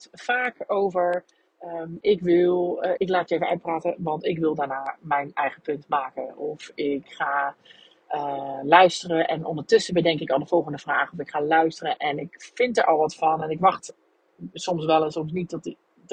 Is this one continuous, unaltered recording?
no; 1 cut; at 3.0 s

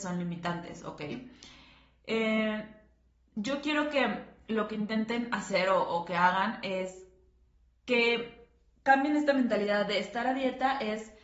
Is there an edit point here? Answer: no; 0 cuts

